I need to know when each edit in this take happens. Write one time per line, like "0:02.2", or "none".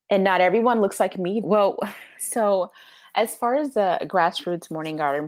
0:01.4